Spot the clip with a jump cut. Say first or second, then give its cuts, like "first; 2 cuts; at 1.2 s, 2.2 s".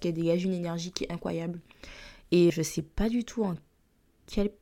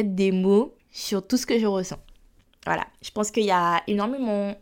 first; 1 cut; at 2.5 s